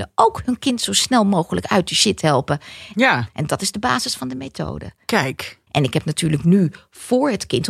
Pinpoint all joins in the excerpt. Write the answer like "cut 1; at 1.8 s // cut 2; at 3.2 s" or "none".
cut 1; at 2.9 s // cut 2; at 5.7 s